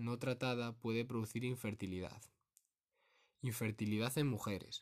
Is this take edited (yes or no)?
no